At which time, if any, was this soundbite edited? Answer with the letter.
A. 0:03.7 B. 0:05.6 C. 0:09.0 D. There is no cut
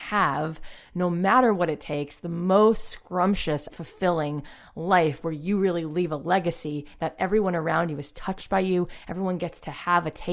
A